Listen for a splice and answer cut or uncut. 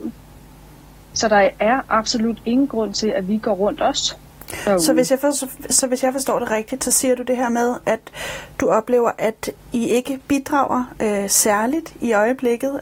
uncut